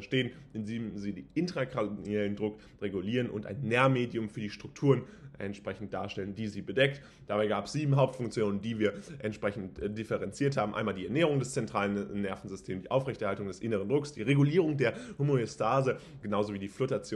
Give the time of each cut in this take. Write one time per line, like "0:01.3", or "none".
0:16.2